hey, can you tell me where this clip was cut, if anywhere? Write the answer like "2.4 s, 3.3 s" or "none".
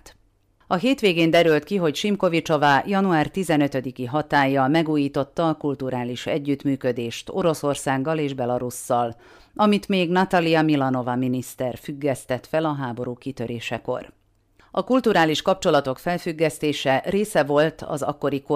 none